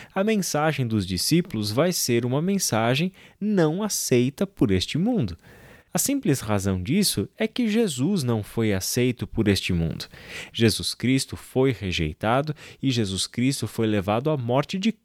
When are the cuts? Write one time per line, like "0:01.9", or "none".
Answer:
0:10.5